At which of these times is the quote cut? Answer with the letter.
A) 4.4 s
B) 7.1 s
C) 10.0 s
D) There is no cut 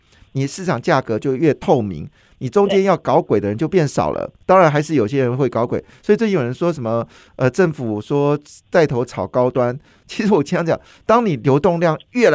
A